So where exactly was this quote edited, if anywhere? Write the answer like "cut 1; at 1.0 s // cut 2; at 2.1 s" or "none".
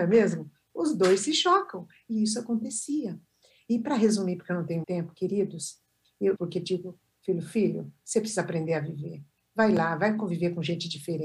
cut 1; at 4.8 s // cut 2; at 6.4 s